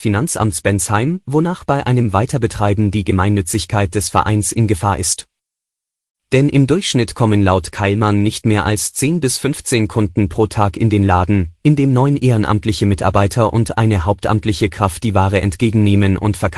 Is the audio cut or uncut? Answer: uncut